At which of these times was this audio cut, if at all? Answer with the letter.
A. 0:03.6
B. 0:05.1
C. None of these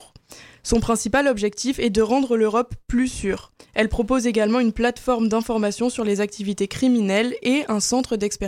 A